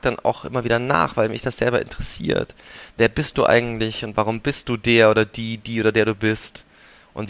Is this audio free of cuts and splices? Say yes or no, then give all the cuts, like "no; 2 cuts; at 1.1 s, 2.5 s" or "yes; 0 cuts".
yes; 0 cuts